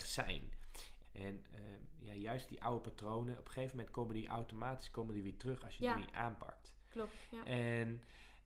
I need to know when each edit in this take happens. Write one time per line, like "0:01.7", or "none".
0:01.0